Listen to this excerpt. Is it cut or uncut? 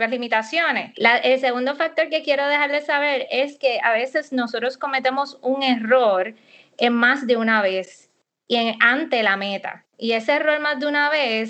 cut